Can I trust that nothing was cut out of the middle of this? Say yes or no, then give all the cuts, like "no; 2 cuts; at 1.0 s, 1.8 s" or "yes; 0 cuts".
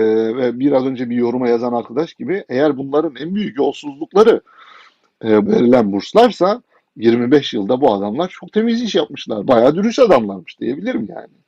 no; 1 cut; at 5.5 s